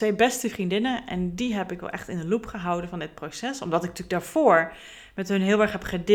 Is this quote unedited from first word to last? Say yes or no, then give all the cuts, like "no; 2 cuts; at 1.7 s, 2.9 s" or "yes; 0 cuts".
yes; 0 cuts